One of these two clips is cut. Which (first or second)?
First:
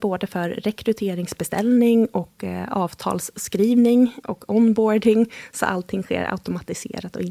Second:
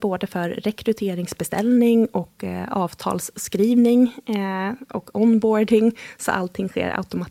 first